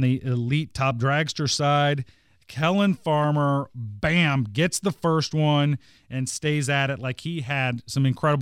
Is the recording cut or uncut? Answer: uncut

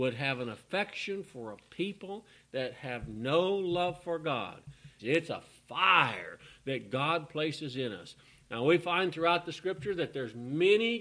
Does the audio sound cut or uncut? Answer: cut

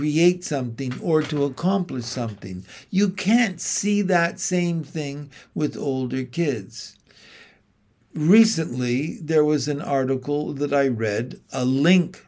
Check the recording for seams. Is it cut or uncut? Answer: uncut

